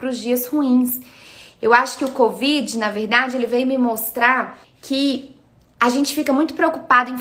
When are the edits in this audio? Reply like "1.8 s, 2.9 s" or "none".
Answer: 4.6 s